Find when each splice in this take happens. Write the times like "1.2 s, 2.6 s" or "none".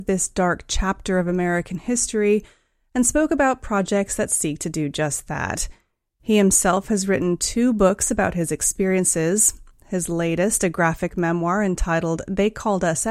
none